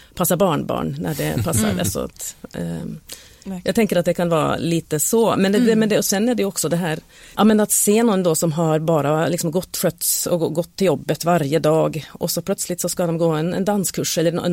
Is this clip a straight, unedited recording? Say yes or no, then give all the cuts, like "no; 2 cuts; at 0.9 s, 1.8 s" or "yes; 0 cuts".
no; 1 cut; at 7.4 s